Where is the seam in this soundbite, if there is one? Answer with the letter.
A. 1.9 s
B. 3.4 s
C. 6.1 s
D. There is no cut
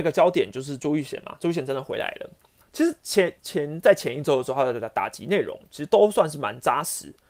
B